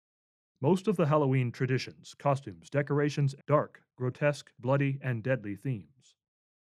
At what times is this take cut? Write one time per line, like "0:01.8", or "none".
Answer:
0:03.4
0:04.5